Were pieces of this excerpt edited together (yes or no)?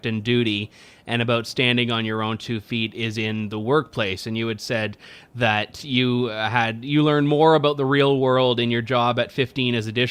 no